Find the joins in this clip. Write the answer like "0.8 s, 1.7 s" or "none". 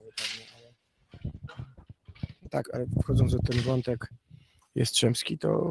2.6 s